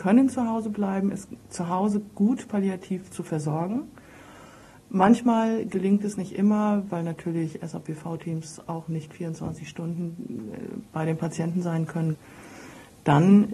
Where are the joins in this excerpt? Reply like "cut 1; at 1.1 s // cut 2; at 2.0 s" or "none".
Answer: cut 1; at 1.4 s // cut 2; at 6.9 s